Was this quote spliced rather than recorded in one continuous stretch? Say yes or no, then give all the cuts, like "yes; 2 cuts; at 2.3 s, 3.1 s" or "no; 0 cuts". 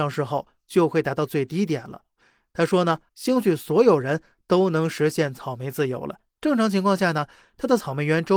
yes; 2 cuts; at 3.1 s, 6.4 s